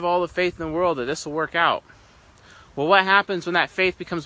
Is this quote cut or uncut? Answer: uncut